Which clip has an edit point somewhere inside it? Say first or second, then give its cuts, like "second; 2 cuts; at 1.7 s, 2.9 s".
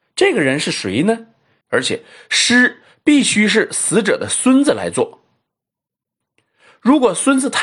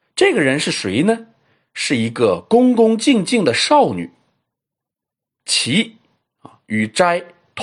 first; 1 cut; at 1.6 s